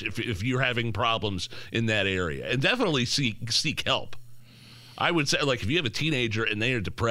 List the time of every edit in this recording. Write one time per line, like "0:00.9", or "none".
none